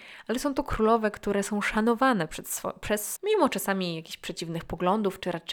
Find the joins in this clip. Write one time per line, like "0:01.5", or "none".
0:03.2